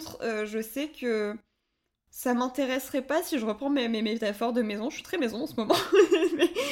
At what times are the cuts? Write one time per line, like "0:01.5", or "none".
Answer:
none